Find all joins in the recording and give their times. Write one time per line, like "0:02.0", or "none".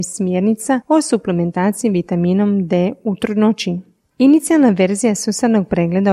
none